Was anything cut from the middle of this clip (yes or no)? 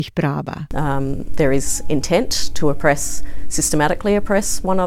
no